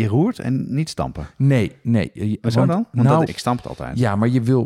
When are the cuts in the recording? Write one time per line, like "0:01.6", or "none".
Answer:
0:03.3